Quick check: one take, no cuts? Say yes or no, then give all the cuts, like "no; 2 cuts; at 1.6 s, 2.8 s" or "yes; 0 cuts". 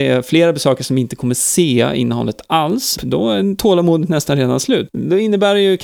no; 2 cuts; at 3.0 s, 4.9 s